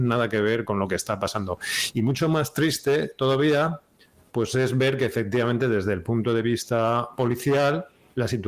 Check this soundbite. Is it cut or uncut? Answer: uncut